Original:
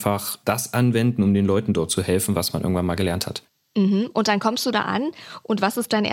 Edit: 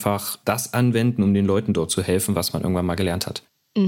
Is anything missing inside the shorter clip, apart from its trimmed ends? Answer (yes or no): no